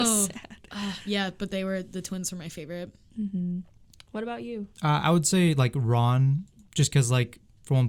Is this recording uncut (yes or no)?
yes